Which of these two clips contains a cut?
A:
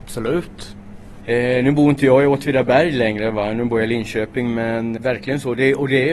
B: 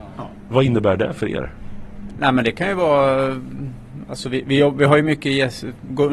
A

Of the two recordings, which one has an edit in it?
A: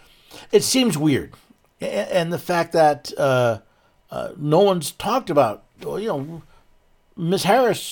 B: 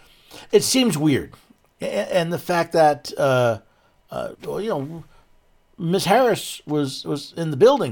B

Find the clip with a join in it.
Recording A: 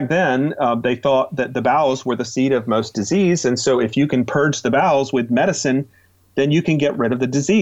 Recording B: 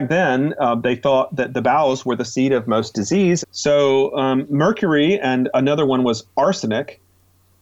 B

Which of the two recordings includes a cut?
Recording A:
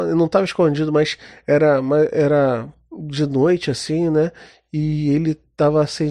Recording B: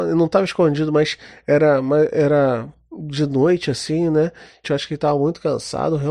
B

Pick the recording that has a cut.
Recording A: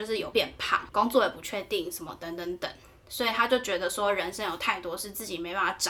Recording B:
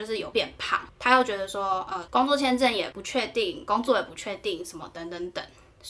A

